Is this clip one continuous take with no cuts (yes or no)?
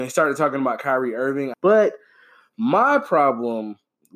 no